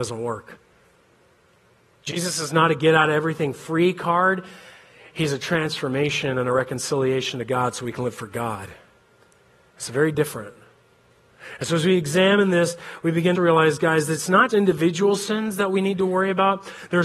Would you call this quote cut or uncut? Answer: cut